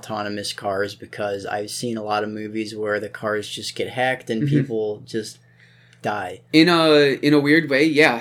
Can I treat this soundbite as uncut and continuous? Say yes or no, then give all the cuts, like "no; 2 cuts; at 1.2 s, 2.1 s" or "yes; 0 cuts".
yes; 0 cuts